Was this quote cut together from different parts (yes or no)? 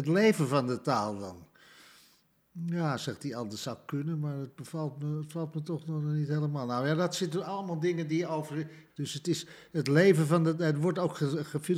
yes